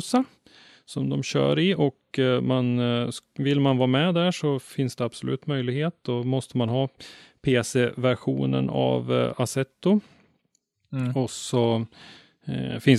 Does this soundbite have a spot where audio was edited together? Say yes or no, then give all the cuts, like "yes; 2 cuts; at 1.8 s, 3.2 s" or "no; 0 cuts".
no; 0 cuts